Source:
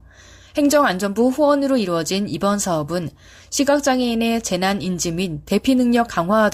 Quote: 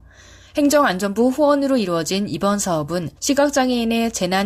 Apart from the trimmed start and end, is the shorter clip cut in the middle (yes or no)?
yes